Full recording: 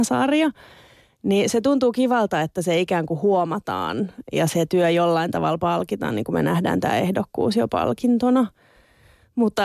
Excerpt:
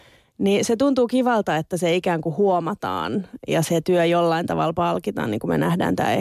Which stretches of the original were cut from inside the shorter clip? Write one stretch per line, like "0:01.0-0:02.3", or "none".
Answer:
none